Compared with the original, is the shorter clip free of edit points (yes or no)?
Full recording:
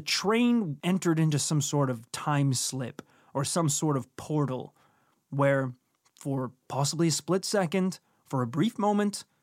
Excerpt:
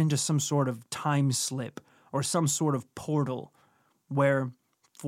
yes